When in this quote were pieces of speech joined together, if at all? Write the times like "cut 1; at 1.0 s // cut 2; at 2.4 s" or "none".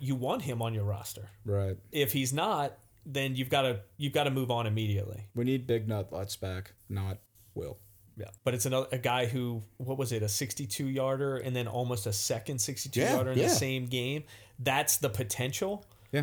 cut 1; at 8.4 s

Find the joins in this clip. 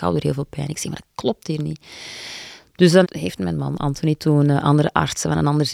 cut 1; at 3.0 s

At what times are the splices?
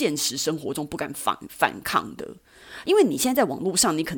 cut 1; at 2.8 s

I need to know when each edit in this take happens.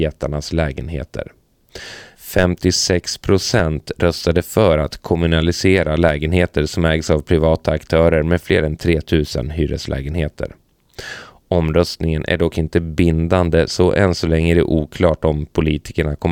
cut 1; at 2.1 s

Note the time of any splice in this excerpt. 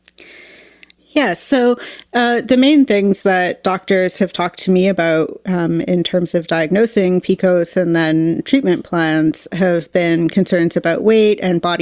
none

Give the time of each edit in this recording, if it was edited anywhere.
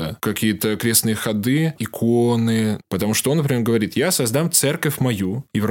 cut 1; at 1.8 s // cut 2; at 2.8 s

